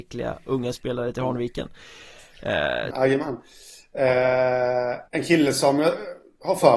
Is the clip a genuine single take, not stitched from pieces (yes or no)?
no